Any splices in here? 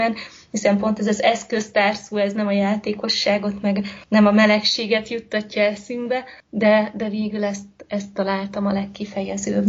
no; 0 cuts

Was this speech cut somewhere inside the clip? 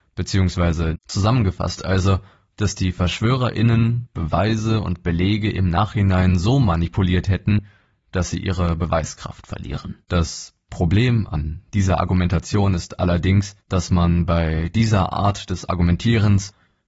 yes; 3 cuts; at 0.9 s, 10.0 s, 13.6 s

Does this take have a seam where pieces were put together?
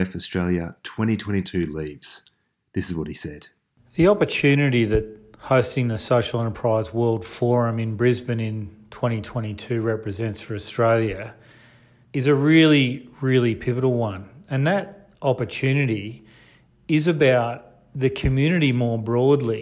no; 0 cuts

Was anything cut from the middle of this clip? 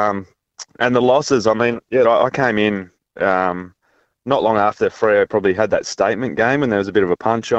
yes; 1 cut; at 2.0 s

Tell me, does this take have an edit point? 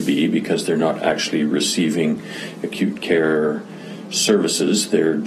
no; 0 cuts

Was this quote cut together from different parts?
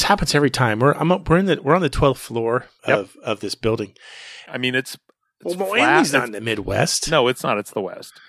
yes; 2 cuts; at 2.8 s, 4.5 s

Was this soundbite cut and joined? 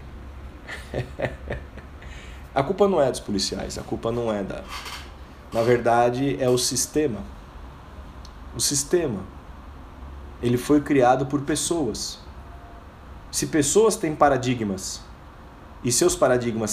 no; 0 cuts

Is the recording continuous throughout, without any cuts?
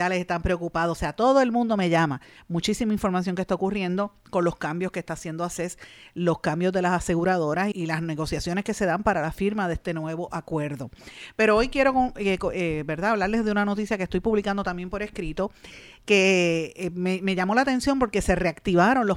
no; 1 cut; at 7.7 s

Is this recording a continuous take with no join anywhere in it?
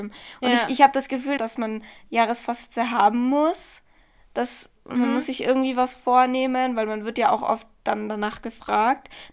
no; 2 cuts; at 1.4 s, 4.8 s

